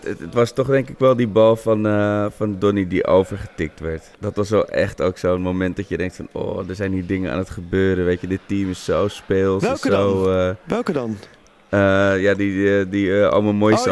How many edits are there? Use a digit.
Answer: 1